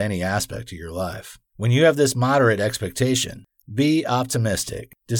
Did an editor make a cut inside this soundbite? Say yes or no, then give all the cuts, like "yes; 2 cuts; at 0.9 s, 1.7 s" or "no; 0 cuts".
yes; 2 cuts; at 1.5 s, 3.6 s